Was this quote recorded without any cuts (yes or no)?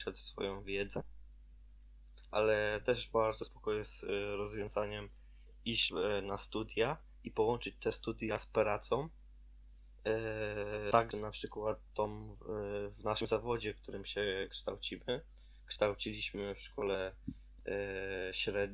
yes